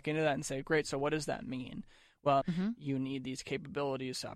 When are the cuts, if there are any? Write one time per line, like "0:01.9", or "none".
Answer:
0:02.4